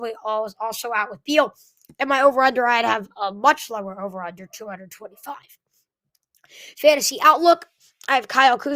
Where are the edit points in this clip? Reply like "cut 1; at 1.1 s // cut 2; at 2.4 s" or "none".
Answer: none

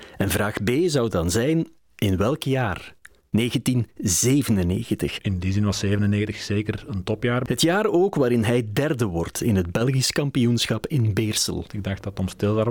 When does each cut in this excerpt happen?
none

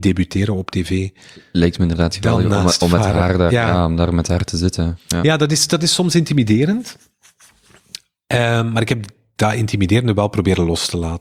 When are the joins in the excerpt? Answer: none

